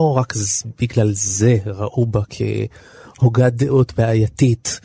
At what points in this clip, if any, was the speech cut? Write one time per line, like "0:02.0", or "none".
none